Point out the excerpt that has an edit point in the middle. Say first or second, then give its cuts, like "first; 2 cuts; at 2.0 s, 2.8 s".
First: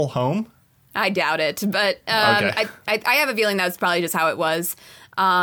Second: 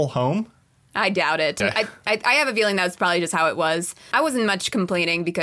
second; 2 cuts; at 1.6 s, 4.1 s